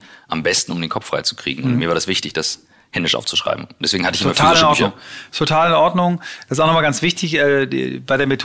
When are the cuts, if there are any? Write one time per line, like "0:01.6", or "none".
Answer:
none